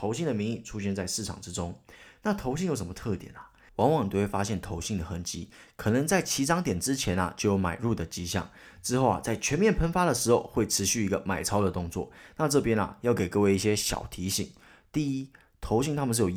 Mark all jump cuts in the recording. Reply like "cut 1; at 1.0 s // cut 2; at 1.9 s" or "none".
cut 1; at 3.7 s